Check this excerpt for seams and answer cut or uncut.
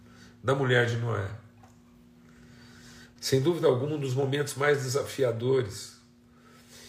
cut